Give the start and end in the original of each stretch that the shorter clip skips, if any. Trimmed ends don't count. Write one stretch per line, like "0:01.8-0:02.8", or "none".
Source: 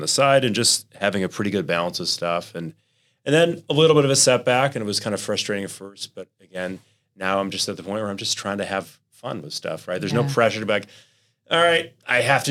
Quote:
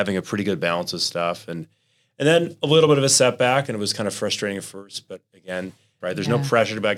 0:07.1-0:09.9